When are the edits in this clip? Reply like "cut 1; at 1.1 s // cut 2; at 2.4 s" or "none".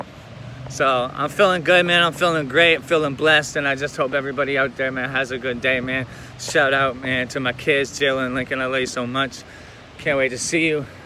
none

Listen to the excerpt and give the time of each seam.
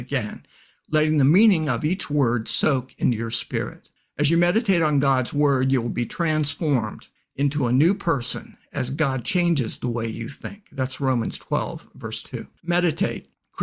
cut 1; at 12.6 s

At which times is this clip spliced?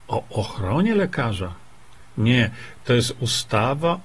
none

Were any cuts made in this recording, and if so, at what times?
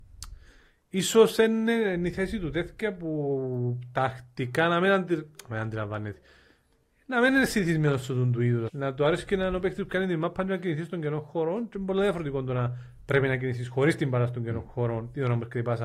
cut 1; at 8.7 s

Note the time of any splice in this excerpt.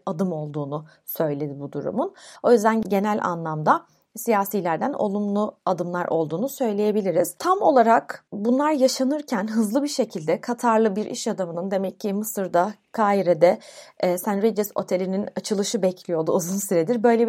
none

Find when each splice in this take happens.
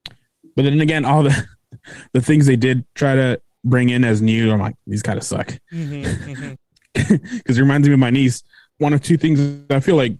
cut 1; at 4.8 s // cut 2; at 6.6 s // cut 3; at 8.7 s

